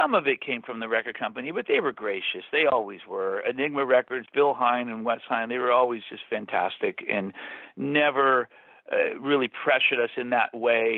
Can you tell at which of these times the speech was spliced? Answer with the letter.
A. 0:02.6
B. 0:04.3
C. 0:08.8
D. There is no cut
D